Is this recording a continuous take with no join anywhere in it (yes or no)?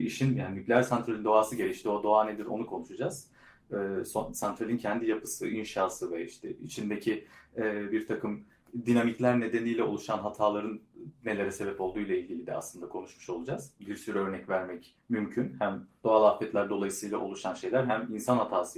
no